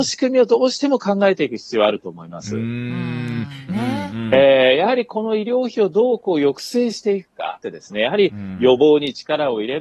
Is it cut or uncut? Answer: cut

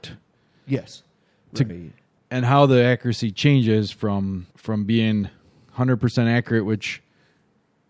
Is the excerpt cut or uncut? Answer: cut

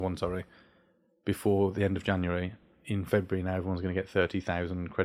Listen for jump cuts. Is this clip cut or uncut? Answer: uncut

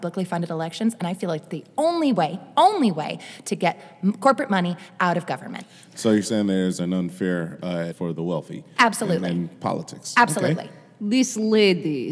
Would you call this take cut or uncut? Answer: cut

